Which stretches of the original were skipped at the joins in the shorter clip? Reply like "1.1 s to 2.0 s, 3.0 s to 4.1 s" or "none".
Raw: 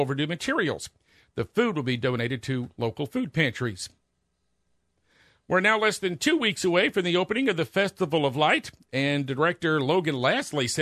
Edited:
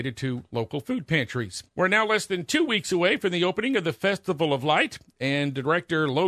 3.9 s to 5.4 s